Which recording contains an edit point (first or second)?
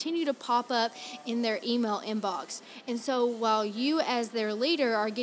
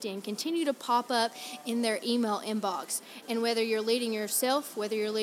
second